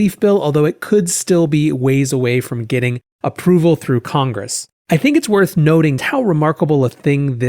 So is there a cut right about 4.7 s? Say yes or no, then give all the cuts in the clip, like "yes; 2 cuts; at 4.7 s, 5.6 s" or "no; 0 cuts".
yes; 2 cuts; at 4.7 s, 6.0 s